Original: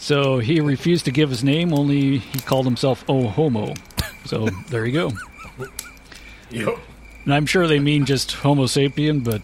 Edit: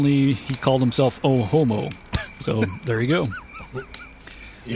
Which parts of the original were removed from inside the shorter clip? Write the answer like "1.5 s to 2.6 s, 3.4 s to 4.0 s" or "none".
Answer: none